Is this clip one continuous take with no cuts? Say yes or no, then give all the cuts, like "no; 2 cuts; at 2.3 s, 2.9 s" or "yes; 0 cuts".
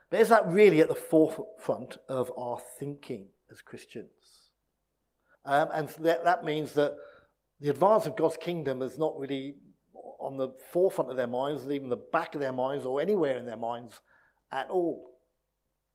no; 1 cut; at 5.3 s